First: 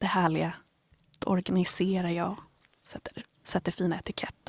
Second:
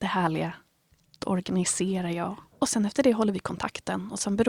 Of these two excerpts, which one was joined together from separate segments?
second; 1 cut; at 2.5 s

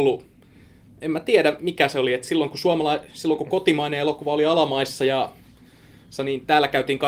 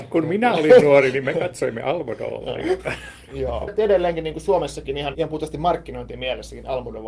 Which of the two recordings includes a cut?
second; 2 cuts; at 3.7 s, 5.1 s

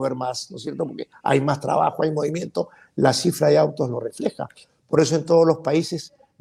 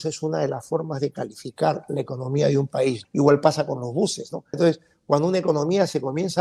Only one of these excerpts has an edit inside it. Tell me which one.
second; 2 cuts; at 3.0 s, 4.5 s

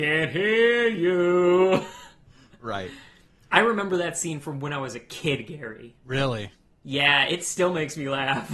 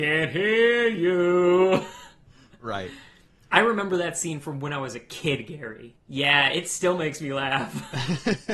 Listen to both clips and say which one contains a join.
second; 1 cut; at 6.0 s

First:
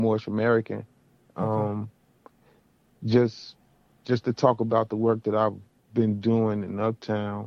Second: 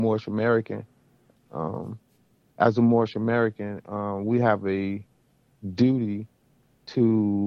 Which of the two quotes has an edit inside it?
second; 1 cut; at 1.3 s

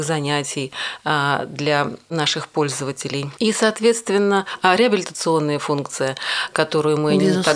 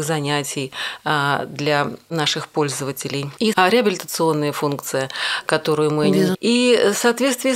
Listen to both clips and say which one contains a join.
second; 2 cuts; at 3.5 s, 6.3 s

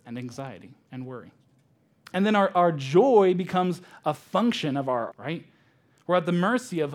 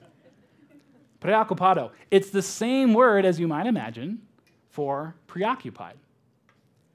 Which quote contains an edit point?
first; 2 cuts; at 1.9 s, 5.1 s

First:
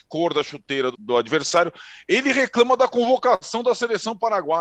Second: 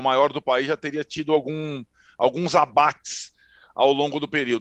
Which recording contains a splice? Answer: first; 1 cut; at 0.9 s

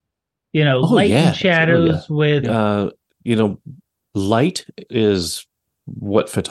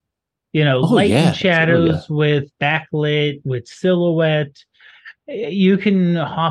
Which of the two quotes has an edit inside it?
first; 2 cuts; at 2.4 s, 4.9 s

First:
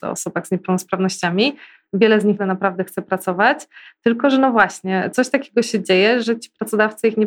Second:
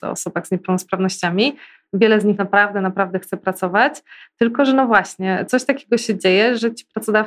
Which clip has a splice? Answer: first; 1 cut; at 2.4 s

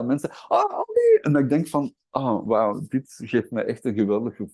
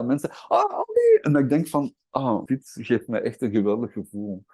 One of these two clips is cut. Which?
second; 1 cut; at 2.5 s

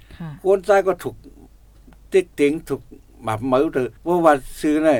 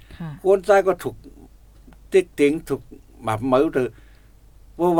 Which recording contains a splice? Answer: first; 1 cut; at 4.0 s

